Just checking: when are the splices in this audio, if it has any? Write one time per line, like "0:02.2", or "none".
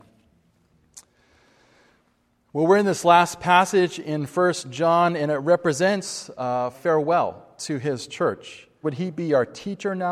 0:06.7
0:08.8